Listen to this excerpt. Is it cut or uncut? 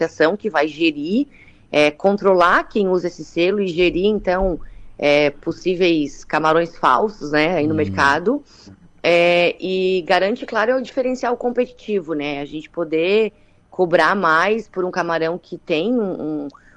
uncut